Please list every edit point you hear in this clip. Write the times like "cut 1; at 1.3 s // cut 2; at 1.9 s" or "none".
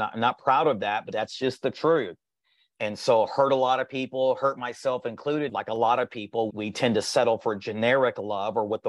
cut 1; at 5.5 s // cut 2; at 6.5 s